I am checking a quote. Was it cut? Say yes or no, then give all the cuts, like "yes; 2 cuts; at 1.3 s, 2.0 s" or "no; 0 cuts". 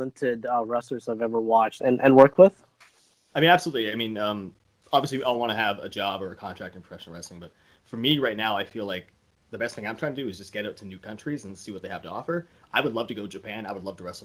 yes; 1 cut; at 1.8 s